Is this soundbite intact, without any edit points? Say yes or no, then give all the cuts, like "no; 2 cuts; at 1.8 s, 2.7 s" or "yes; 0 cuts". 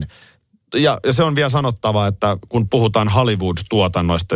yes; 0 cuts